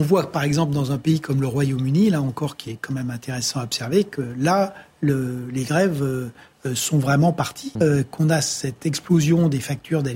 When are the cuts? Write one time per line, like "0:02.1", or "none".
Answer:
0:07.8